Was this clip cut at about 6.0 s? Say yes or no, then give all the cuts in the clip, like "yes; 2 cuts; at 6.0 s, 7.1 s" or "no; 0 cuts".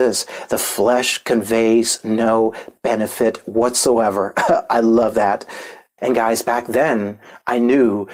yes; 1 cut; at 6.0 s